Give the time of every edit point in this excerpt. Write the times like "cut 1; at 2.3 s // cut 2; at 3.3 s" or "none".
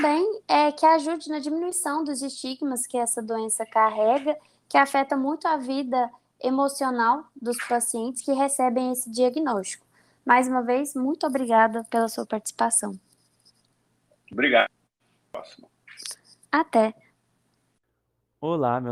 none